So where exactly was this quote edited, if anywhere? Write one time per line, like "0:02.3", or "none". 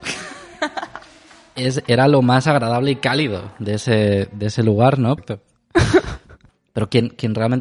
0:05.2